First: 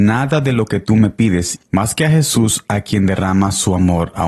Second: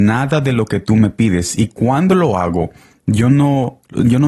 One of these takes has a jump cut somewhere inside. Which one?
first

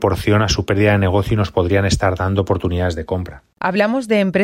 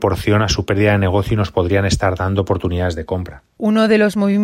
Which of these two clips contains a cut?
first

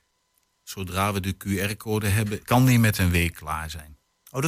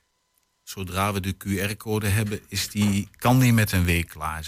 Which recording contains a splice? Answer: first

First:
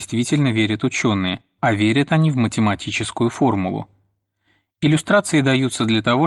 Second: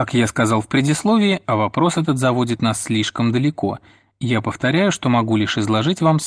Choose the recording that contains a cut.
second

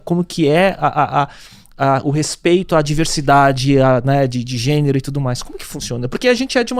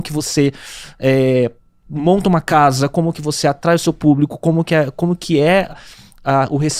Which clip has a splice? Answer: second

